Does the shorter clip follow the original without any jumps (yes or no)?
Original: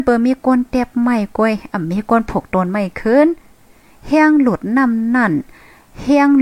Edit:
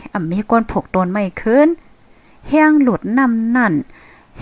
yes